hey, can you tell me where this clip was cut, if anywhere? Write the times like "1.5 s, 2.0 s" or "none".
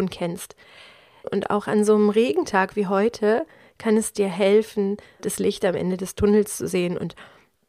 1.2 s, 5.2 s